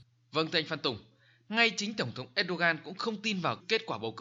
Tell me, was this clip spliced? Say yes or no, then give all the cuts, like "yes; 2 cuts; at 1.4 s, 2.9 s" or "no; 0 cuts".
no; 0 cuts